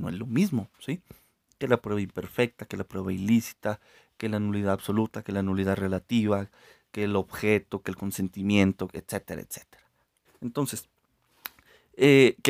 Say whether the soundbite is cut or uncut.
cut